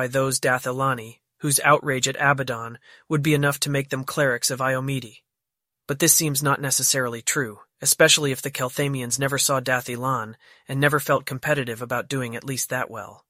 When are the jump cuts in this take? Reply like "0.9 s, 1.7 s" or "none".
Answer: 5.7 s